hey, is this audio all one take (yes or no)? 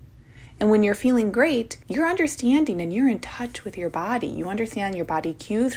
no